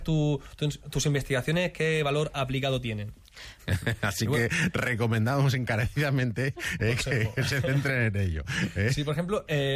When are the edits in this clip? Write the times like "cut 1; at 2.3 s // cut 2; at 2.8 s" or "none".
cut 1; at 3.6 s // cut 2; at 6.8 s